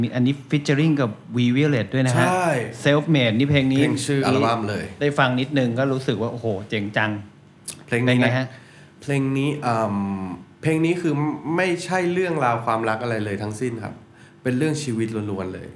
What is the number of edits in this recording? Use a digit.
2